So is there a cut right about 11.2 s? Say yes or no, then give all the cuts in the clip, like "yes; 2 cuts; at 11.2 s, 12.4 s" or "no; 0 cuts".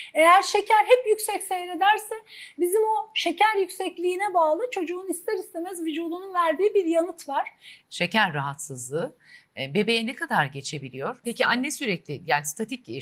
yes; 2 cuts; at 7.8 s, 11.2 s